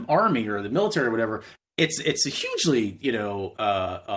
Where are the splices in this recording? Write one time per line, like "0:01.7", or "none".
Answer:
none